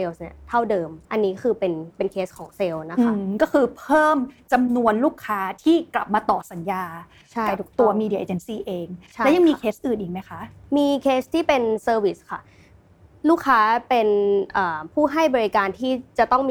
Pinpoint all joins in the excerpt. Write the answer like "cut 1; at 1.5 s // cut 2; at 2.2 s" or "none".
cut 1; at 1.0 s